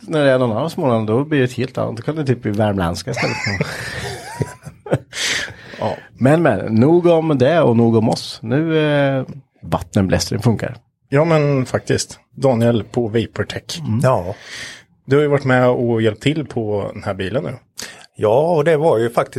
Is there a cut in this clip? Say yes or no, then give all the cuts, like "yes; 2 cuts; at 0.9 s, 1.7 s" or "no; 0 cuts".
yes; 1 cut; at 9.6 s